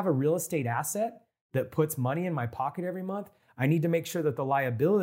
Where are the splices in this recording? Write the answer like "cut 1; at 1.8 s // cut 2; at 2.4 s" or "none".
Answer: none